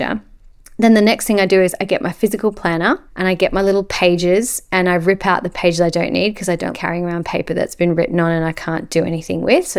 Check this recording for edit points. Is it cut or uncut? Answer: cut